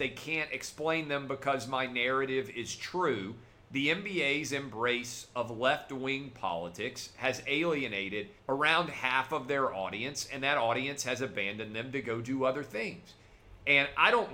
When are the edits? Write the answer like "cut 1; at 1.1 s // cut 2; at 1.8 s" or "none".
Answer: cut 1; at 8.4 s